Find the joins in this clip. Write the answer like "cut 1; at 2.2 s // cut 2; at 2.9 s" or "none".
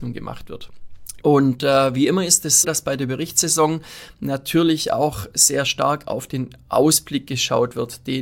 cut 1; at 1.2 s // cut 2; at 2.6 s